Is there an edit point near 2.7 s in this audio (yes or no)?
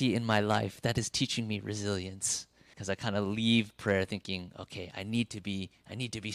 yes